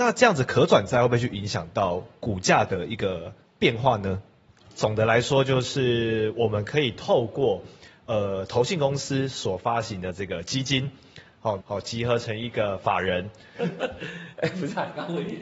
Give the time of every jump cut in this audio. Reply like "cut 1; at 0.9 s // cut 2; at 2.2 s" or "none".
cut 1; at 4.6 s // cut 2; at 11.6 s // cut 3; at 13.5 s